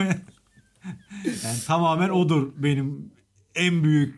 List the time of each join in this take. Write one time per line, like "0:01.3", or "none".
none